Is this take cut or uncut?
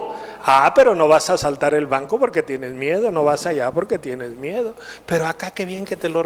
uncut